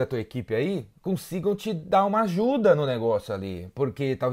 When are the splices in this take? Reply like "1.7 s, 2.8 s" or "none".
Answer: none